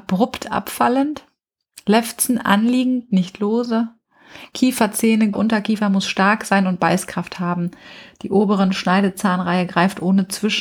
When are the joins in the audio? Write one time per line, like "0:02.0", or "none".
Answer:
0:05.3